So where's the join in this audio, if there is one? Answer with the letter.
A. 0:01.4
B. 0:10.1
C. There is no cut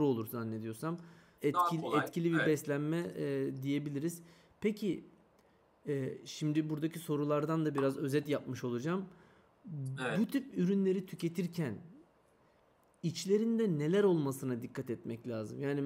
A